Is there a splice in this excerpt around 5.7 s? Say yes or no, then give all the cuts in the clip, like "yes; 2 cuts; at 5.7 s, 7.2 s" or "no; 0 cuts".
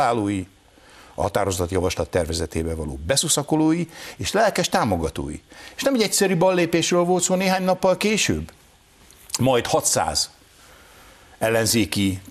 no; 0 cuts